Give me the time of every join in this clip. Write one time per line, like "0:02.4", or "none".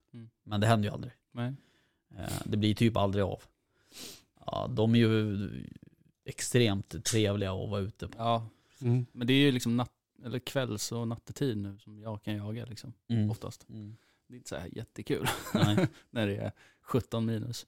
0:04.4